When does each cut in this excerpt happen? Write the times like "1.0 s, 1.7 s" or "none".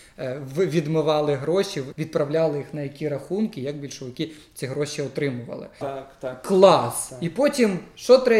1.9 s, 5.8 s